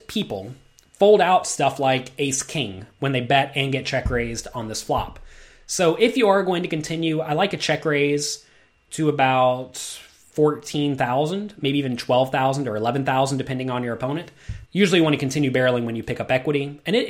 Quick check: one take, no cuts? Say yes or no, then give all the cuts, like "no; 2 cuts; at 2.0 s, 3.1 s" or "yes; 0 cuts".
no; 1 cut; at 14.6 s